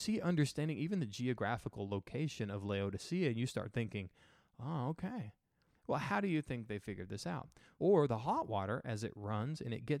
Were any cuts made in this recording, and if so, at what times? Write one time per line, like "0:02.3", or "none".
0:07.8